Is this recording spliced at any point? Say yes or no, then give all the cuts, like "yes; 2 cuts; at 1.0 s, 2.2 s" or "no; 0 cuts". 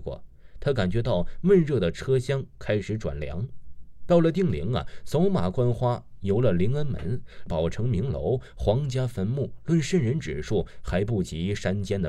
yes; 1 cut; at 7.5 s